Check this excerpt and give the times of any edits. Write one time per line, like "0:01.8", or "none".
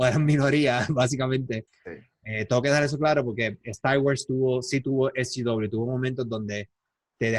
0:01.7
0:03.6